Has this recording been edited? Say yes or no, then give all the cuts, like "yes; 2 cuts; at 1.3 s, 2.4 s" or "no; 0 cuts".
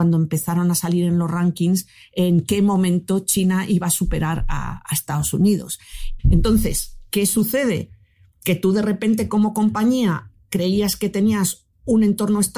yes; 1 cut; at 6.2 s